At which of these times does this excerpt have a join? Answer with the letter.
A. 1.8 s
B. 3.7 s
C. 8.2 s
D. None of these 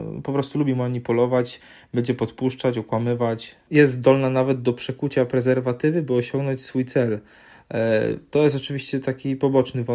B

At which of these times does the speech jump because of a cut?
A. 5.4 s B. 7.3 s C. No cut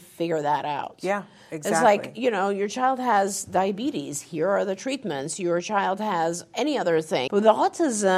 B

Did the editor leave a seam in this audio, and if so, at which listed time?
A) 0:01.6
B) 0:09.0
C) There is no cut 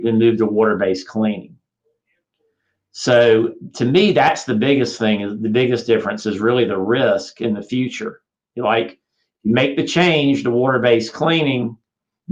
C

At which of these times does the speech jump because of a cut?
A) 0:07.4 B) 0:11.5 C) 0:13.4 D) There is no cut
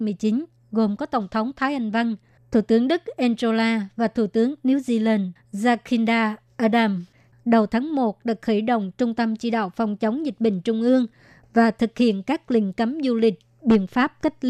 A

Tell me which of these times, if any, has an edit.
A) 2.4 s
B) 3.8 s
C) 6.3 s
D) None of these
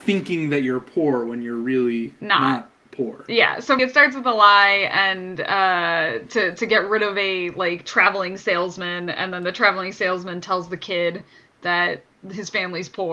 B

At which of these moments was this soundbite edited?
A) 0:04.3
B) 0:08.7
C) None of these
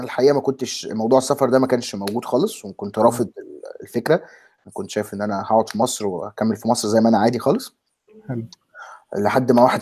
C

